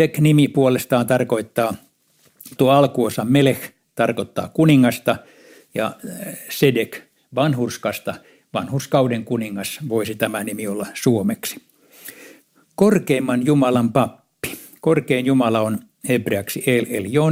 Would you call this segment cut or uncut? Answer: cut